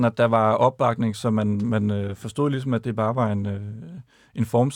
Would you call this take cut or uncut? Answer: uncut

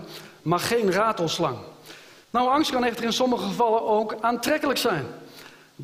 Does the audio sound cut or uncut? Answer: cut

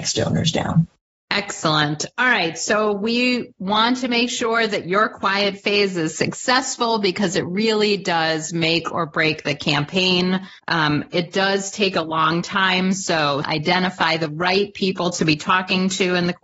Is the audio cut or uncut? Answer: cut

